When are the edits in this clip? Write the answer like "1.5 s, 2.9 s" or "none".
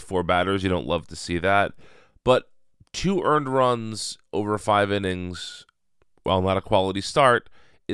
none